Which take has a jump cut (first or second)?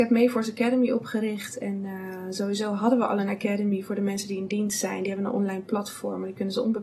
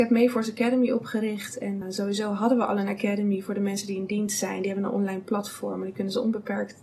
second